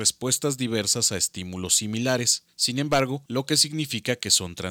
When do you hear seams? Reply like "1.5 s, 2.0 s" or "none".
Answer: 3.3 s